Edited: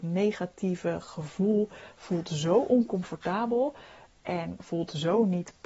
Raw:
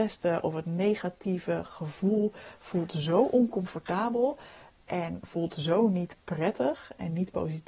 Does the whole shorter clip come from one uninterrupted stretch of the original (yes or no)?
yes